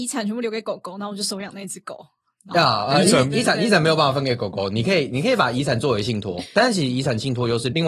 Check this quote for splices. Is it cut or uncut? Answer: uncut